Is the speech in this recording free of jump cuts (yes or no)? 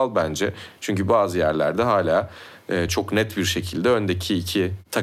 yes